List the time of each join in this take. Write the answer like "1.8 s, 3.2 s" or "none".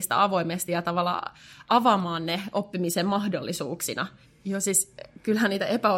4.3 s